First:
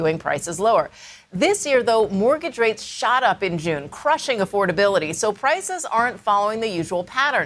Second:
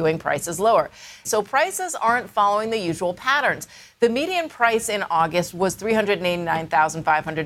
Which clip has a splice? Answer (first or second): second